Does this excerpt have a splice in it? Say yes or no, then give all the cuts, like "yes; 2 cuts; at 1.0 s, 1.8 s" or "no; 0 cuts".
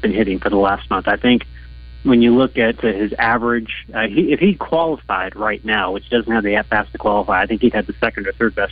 no; 0 cuts